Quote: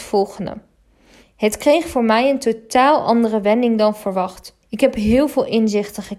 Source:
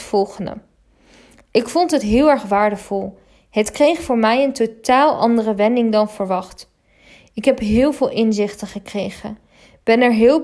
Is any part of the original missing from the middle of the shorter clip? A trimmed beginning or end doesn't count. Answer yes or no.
yes